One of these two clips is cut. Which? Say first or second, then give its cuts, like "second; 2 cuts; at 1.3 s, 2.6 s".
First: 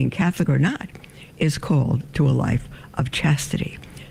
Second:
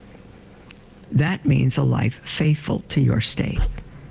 second; 1 cut; at 1.0 s